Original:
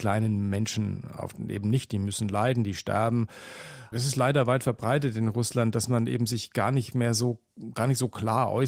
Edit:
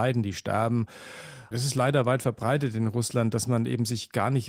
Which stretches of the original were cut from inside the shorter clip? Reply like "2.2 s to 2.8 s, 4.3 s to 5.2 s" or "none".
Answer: none